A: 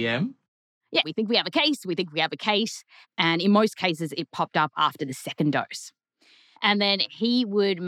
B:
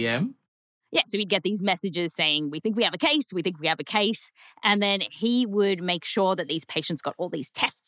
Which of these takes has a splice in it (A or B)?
A